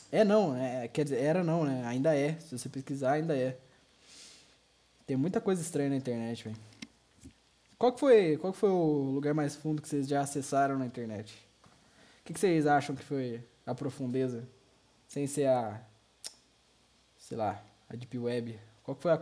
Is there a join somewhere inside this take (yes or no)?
no